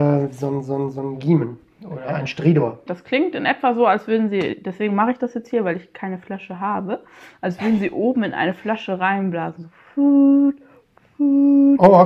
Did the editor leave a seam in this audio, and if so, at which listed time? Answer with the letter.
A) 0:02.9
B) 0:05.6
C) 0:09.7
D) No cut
A